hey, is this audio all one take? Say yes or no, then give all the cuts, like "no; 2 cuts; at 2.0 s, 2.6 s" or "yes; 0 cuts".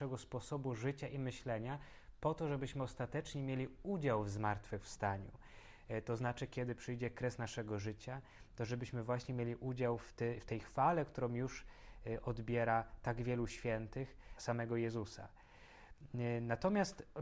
no; 1 cut; at 14.4 s